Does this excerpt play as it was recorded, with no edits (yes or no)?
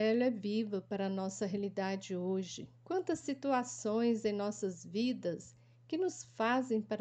no